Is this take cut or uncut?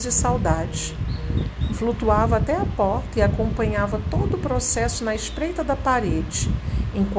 cut